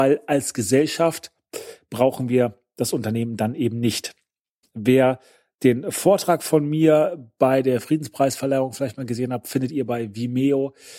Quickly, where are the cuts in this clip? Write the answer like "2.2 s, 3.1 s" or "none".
4.6 s